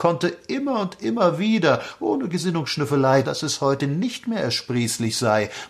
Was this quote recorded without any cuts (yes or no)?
no